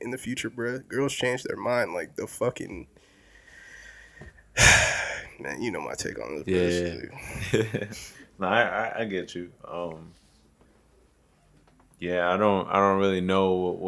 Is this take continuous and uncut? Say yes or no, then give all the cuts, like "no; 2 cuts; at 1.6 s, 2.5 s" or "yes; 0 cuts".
yes; 0 cuts